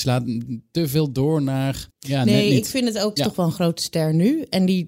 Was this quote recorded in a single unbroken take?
no; 2 cuts; at 1.9 s, 3.2 s

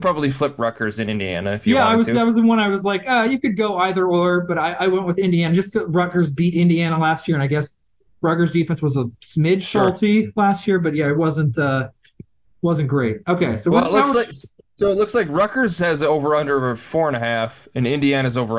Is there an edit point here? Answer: no; 0 cuts

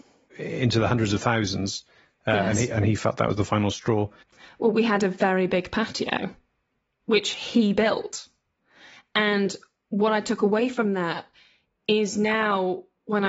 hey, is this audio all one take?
yes; 0 cuts

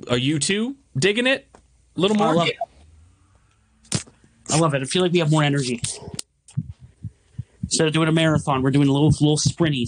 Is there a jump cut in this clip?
no; 0 cuts

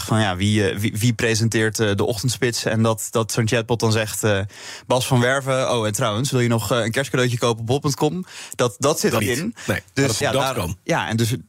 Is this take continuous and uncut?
no; 2 cuts; at 9.2 s, 10.2 s

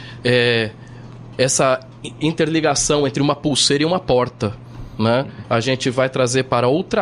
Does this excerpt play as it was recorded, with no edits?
no; 1 cut; at 5.4 s

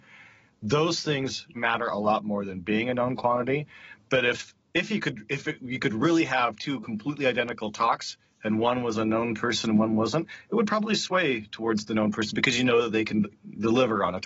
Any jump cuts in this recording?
yes; 1 cut; at 1.5 s

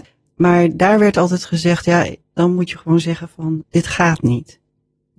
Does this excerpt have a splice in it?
yes; 1 cut; at 2.2 s

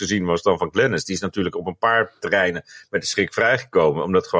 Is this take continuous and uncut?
yes; 0 cuts

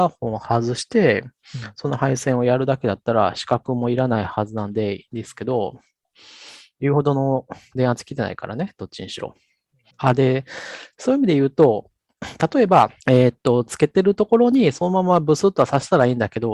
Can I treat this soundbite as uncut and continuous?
no; 2 cuts; at 9.9 s, 13.0 s

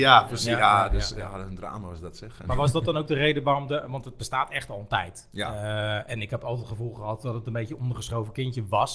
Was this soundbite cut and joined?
no; 0 cuts

